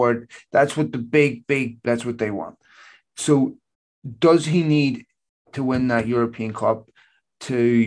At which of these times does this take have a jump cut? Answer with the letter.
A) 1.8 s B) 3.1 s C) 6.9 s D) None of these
A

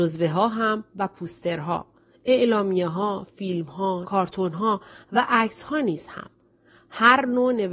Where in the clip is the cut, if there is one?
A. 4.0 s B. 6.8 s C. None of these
A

